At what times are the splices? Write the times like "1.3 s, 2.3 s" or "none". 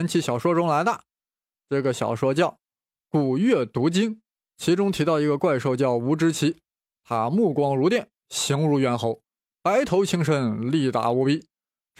none